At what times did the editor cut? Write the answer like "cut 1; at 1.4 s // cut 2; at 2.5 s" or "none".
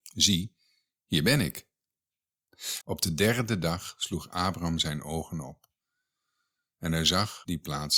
cut 1; at 2.8 s